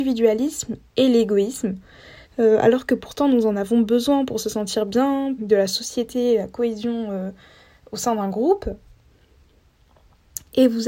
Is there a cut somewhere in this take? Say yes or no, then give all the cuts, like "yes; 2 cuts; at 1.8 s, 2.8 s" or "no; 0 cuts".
yes; 2 cuts; at 2.3 s, 5.4 s